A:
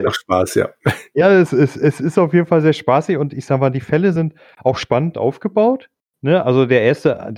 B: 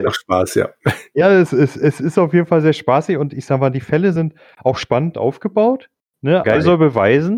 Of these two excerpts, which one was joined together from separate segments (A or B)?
B